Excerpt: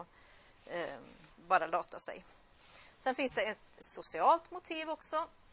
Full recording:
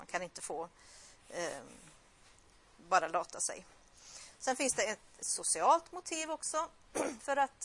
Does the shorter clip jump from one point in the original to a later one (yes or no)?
yes